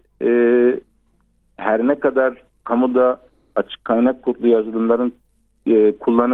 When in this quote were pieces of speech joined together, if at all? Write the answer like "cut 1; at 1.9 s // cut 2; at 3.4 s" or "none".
none

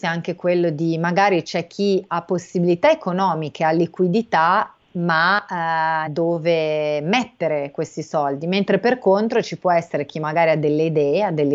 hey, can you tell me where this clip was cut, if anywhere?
cut 1; at 6.1 s

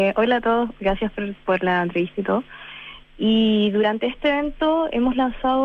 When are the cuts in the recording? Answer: cut 1; at 3.0 s

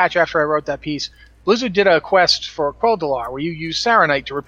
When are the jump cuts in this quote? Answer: none

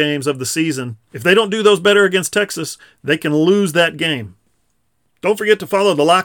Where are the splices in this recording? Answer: none

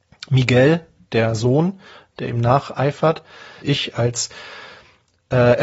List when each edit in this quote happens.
cut 1; at 3.6 s

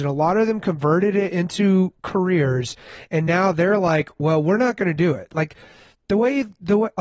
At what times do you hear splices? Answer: none

